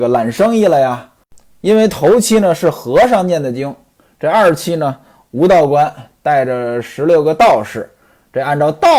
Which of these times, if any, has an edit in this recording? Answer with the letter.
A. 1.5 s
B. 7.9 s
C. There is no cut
C